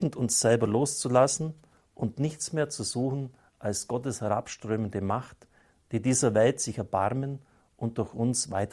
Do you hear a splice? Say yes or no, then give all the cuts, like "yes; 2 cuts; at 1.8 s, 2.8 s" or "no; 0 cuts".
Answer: no; 0 cuts